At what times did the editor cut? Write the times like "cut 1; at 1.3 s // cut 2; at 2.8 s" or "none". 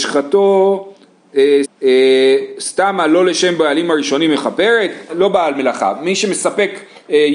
cut 1; at 1.6 s // cut 2; at 5.1 s